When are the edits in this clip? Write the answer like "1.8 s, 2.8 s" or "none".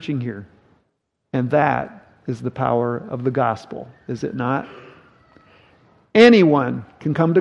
1.2 s